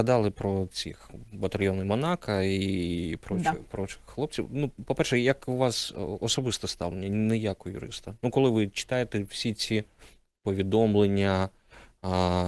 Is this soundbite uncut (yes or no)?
yes